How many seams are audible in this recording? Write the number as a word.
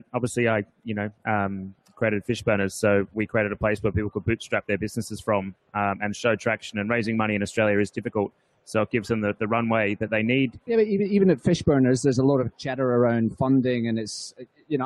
one